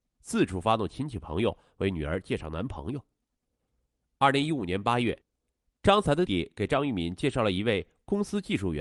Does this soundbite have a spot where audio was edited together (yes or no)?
yes